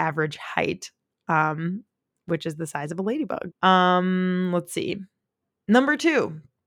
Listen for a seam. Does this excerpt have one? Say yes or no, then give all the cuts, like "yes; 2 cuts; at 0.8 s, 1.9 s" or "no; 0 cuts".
yes; 1 cut; at 3.5 s